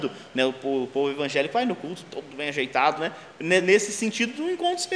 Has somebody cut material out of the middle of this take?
yes; 1 cut; at 3.0 s

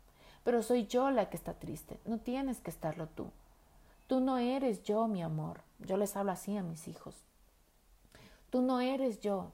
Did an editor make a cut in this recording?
no; 0 cuts

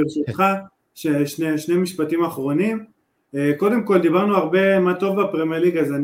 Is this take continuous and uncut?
yes; 0 cuts

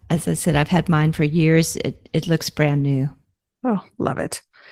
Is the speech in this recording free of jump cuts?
yes; 0 cuts

